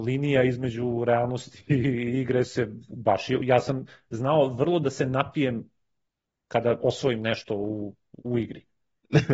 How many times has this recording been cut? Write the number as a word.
zero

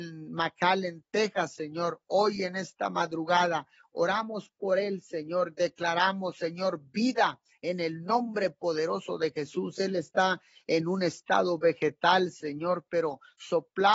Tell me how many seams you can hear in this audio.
zero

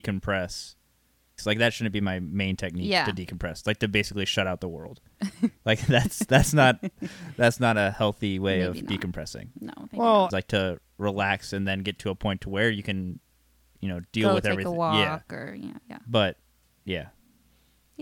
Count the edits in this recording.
two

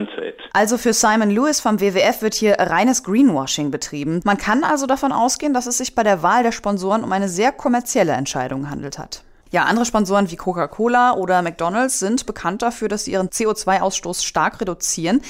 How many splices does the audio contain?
two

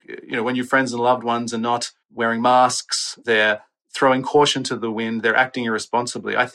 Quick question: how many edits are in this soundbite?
one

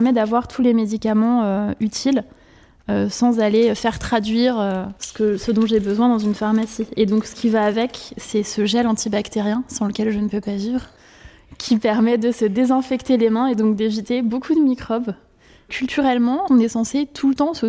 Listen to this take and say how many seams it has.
one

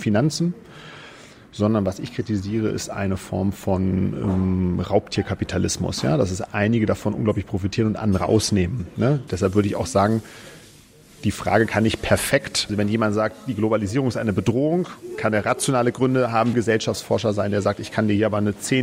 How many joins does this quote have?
three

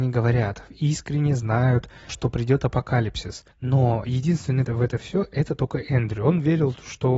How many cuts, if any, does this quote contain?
three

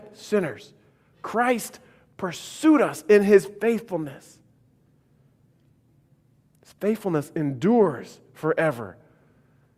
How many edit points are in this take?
zero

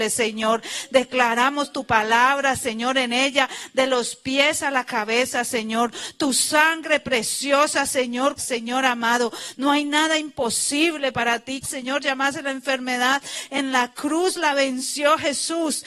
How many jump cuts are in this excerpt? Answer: two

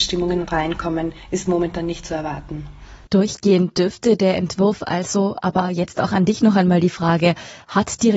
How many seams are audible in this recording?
one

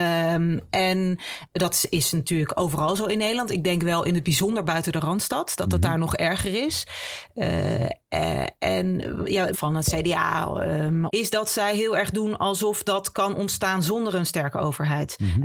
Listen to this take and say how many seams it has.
two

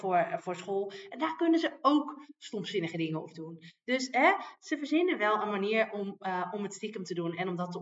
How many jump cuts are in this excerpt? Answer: zero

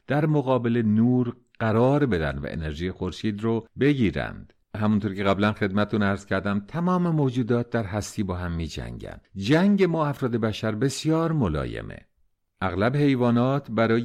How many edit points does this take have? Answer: one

